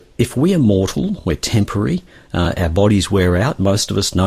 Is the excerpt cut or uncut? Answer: uncut